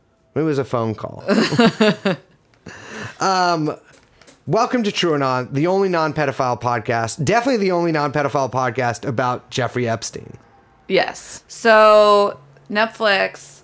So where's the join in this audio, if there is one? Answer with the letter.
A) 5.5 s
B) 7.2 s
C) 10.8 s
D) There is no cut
D